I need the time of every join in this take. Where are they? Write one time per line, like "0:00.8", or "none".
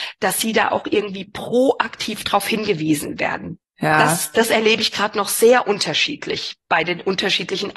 0:03.6